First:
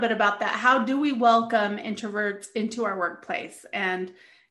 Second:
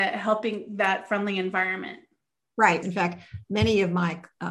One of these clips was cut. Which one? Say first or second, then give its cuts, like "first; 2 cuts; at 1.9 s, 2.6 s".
second; 1 cut; at 2.8 s